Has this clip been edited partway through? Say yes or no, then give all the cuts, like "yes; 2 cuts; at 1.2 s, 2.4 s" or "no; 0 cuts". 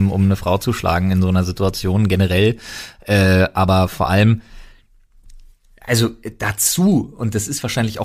no; 0 cuts